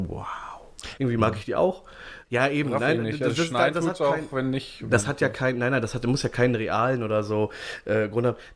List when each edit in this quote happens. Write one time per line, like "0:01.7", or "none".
0:01.0
0:02.2